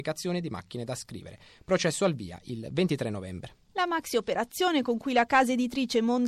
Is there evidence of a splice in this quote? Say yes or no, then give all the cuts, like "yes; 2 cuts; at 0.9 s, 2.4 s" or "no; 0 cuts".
yes; 1 cut; at 3.7 s